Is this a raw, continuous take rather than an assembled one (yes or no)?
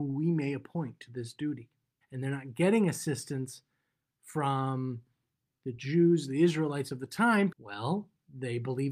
no